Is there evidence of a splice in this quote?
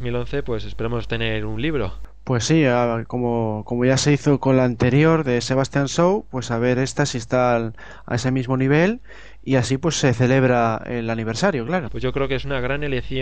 yes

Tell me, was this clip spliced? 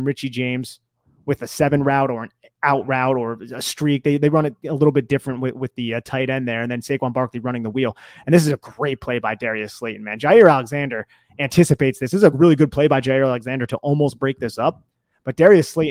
no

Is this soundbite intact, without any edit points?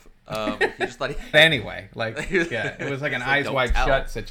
no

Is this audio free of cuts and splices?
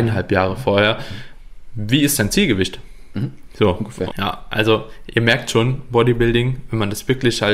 no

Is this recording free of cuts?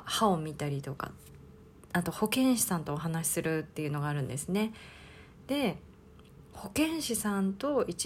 yes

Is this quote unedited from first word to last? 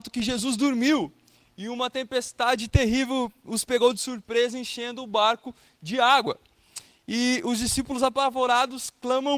yes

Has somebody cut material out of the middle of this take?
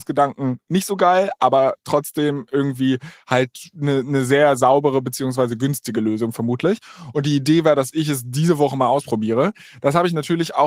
no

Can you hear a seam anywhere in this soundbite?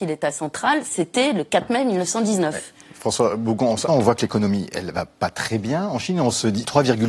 yes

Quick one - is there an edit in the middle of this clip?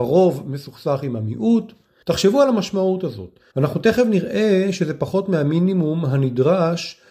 yes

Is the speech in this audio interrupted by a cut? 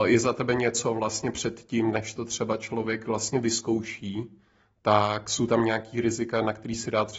no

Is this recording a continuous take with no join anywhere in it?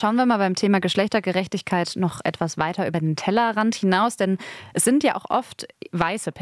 yes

